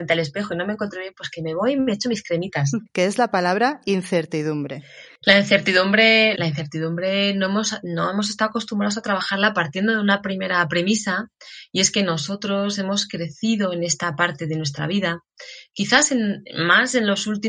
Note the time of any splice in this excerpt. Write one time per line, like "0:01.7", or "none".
0:02.9
0:06.3